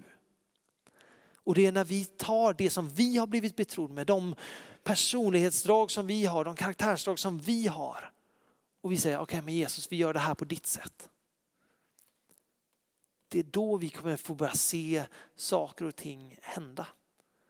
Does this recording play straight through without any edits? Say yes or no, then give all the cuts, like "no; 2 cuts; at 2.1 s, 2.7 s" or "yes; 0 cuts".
yes; 0 cuts